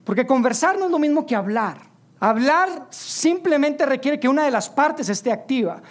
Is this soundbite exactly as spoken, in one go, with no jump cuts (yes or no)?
no